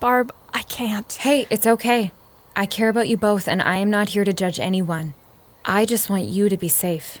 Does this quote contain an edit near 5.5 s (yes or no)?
yes